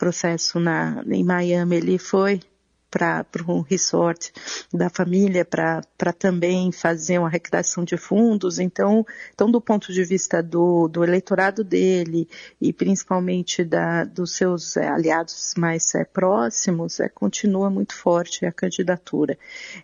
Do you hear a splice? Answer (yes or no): no